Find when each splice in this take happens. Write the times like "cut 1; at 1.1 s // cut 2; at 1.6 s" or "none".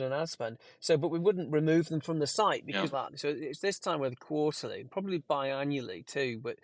cut 1; at 2.9 s